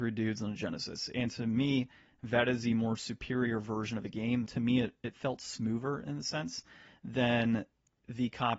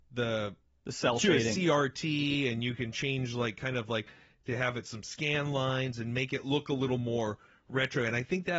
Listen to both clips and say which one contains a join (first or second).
first